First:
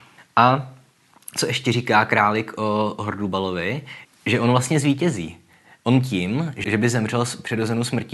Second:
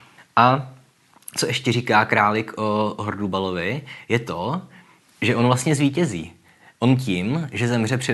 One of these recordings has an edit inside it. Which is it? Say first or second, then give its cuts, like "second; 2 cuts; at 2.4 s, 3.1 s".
first; 2 cuts; at 4.0 s, 6.6 s